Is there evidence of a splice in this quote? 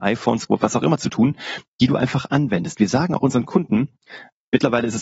yes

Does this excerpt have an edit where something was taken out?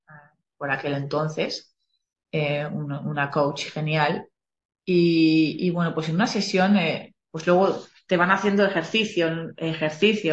no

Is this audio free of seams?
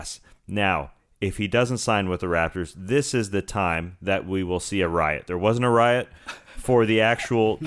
yes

